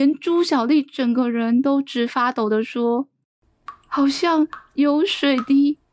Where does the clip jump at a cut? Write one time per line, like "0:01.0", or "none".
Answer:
none